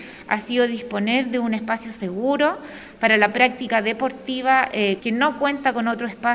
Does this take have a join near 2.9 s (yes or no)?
no